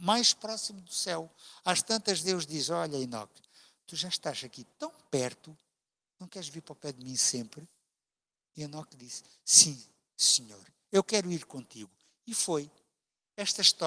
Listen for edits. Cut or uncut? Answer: uncut